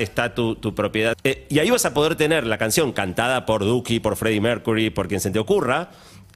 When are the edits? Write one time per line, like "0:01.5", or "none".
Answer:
0:01.1